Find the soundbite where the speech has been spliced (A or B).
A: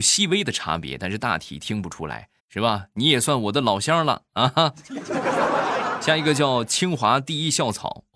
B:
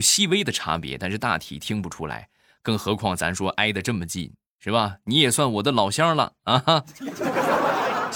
A